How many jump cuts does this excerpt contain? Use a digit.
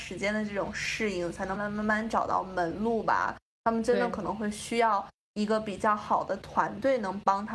1